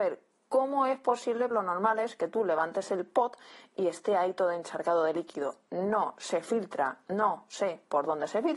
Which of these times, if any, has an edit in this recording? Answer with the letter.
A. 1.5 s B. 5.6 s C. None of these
A